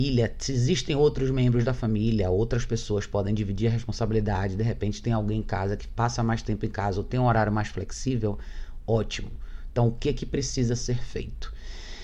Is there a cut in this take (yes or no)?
no